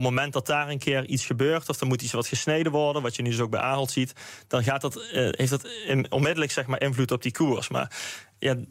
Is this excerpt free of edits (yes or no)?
yes